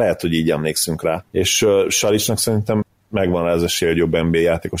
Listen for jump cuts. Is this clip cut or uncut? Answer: uncut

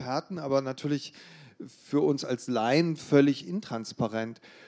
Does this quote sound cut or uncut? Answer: uncut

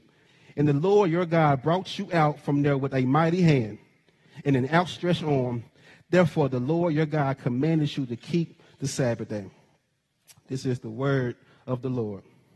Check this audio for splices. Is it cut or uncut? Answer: uncut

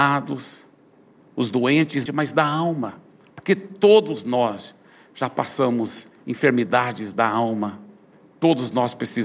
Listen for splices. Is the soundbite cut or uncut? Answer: cut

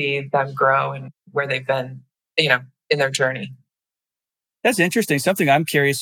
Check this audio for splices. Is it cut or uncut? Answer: uncut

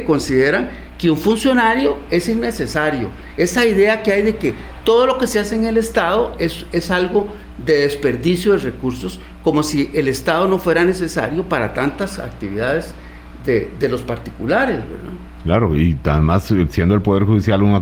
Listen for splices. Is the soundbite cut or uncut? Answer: uncut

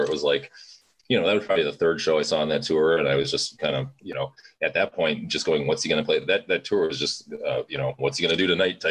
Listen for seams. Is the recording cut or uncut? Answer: uncut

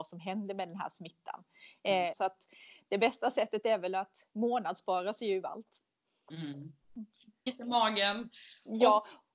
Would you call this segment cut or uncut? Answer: cut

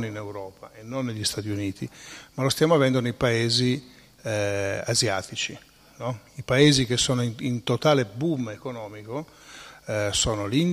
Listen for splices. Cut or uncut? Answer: uncut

